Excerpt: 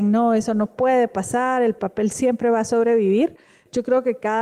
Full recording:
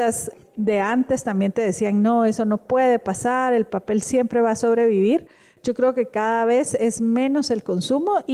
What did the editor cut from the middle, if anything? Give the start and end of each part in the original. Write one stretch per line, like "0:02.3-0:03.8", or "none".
none